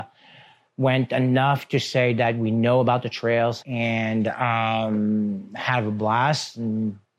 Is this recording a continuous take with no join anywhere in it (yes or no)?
no